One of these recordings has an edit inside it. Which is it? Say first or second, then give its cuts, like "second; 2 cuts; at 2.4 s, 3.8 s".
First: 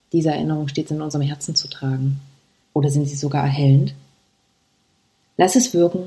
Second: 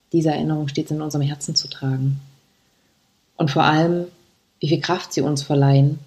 first; 1 cut; at 2.6 s